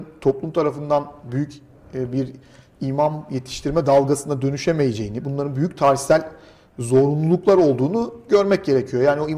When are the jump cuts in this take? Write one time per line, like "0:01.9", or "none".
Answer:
none

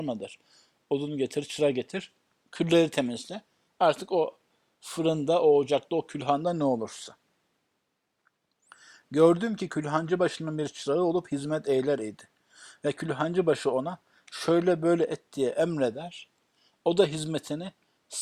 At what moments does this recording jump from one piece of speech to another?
none

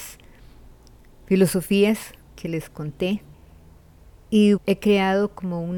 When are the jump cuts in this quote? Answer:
0:04.6

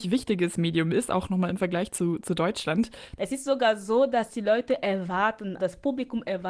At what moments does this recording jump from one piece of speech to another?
0:03.2
0:05.6

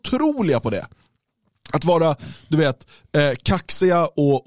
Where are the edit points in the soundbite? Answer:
none

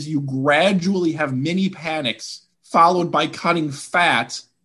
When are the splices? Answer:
0:02.5

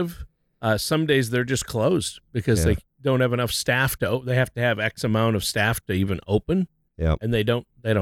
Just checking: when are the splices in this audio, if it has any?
none

